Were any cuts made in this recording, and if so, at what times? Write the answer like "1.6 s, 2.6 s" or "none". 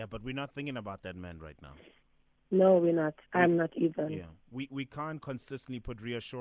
none